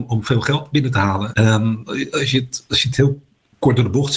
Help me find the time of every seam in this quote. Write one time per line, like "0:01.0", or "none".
0:01.3